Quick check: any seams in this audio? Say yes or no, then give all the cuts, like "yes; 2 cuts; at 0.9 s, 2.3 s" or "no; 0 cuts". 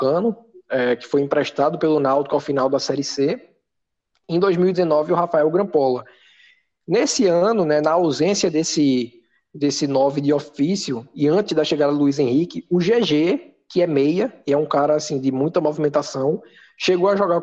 no; 0 cuts